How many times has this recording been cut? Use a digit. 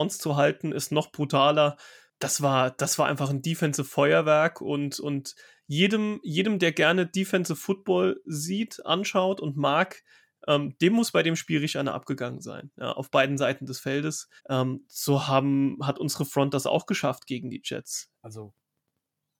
2